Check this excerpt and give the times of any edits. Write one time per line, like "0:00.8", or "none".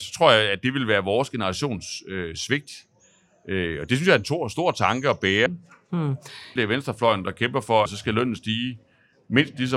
0:05.5
0:06.6
0:07.9